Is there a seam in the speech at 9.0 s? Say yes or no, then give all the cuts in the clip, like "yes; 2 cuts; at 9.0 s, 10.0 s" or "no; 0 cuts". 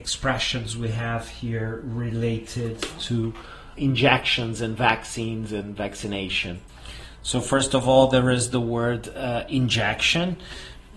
no; 1 cut; at 3.8 s